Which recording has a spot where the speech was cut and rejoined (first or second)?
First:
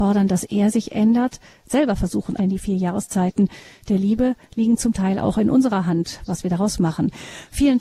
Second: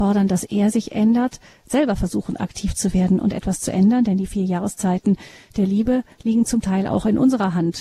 first